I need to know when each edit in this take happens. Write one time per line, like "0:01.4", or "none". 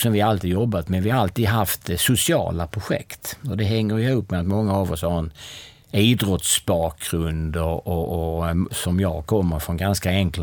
none